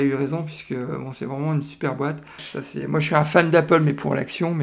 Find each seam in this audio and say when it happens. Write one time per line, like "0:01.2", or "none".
0:02.4